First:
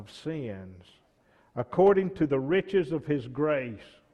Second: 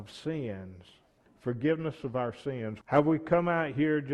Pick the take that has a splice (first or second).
second